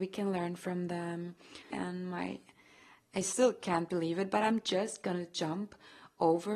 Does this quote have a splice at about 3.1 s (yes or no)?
no